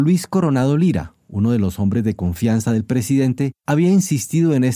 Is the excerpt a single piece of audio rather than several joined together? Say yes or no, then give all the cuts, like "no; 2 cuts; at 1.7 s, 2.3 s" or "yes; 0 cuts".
no; 1 cut; at 3.6 s